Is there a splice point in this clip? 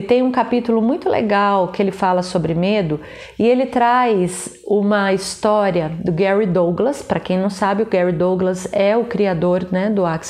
no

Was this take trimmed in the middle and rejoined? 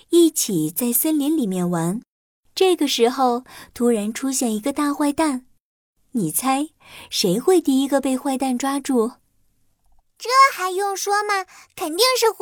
no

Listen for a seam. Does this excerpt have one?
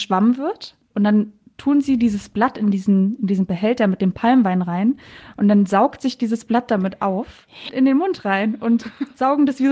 yes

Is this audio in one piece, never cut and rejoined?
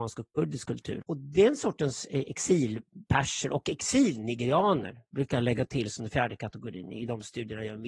no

